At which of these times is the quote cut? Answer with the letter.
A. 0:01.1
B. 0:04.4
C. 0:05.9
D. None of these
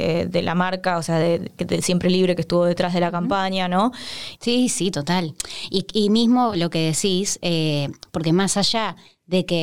B